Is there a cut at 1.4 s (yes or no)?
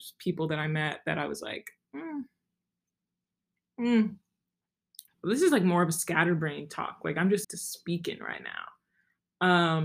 no